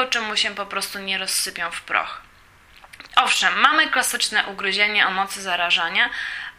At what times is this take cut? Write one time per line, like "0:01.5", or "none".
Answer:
0:03.1